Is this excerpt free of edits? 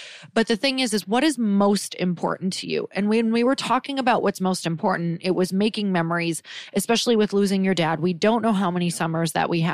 yes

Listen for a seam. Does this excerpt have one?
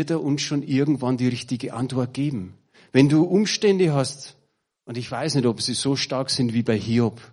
yes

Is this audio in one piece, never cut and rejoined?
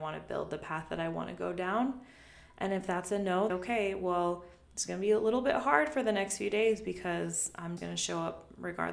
no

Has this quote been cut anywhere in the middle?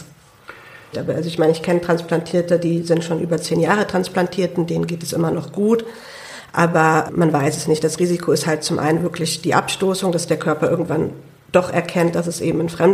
yes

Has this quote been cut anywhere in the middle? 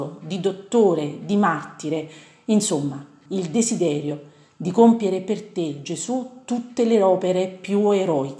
yes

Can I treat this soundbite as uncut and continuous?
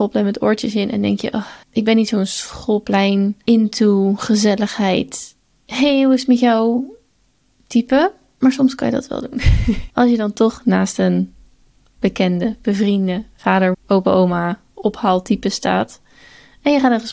no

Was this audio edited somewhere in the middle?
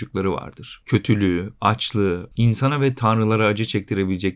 yes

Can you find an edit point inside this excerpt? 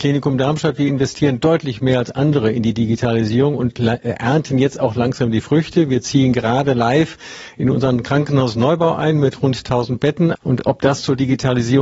yes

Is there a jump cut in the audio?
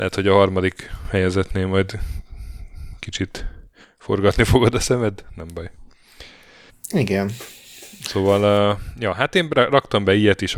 yes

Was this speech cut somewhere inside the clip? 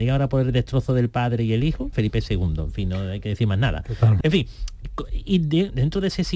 yes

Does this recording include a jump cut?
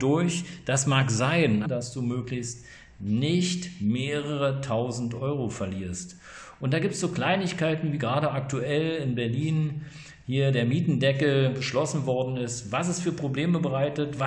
yes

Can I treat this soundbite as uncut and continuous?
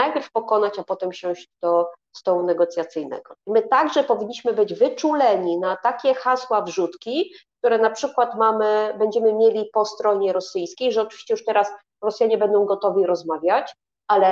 no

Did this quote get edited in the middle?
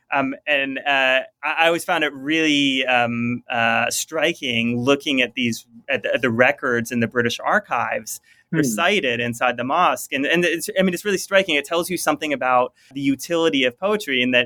yes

